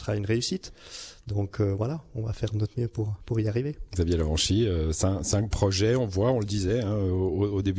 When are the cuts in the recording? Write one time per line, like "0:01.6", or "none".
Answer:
none